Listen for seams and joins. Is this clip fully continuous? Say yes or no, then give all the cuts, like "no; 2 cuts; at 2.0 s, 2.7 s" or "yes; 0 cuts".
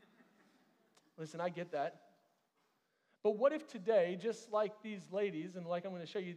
yes; 0 cuts